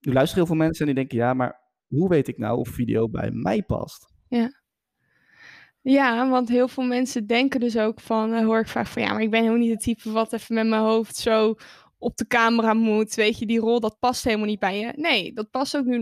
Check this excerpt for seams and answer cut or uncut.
uncut